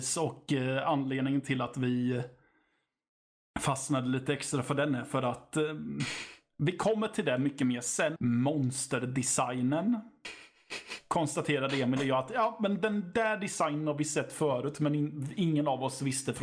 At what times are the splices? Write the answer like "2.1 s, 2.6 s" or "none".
8.2 s